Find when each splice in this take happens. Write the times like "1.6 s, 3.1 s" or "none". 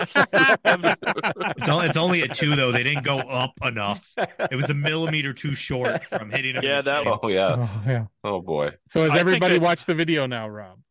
7.0 s